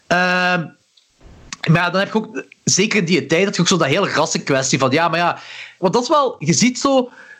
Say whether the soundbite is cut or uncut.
cut